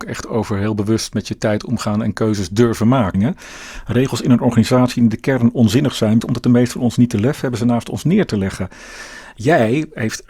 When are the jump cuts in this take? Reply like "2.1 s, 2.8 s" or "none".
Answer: 3.1 s, 6.2 s